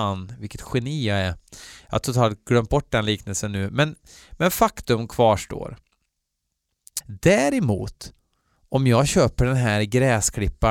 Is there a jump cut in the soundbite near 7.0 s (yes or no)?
yes